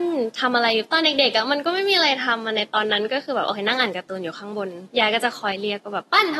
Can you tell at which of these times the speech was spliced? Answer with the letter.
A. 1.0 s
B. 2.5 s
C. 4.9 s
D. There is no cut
C